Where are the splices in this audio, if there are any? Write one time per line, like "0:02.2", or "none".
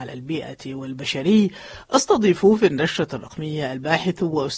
none